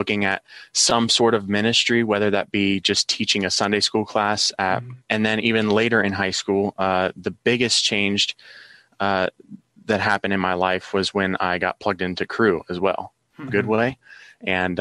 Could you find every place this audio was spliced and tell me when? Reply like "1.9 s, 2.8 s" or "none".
5.0 s, 13.5 s